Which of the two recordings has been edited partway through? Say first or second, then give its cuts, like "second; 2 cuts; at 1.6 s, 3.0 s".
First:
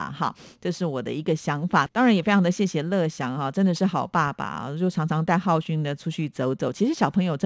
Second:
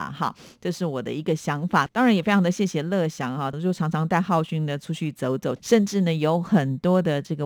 second; 2 cuts; at 3.5 s, 5.6 s